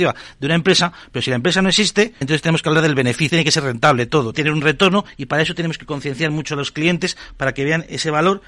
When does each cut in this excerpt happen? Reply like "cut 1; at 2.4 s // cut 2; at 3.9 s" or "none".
cut 1; at 2.2 s // cut 2; at 3.3 s // cut 3; at 4.3 s